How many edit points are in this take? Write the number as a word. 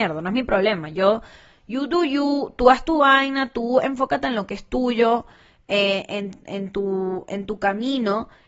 zero